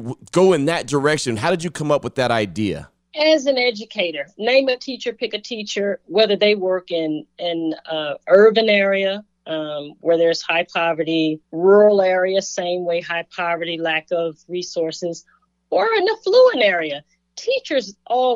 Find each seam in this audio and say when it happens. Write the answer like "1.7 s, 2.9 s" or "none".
11.4 s